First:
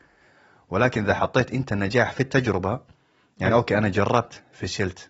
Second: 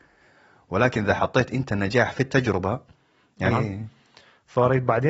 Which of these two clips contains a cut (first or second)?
second